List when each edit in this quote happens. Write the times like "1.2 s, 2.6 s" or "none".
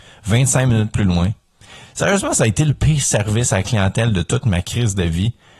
none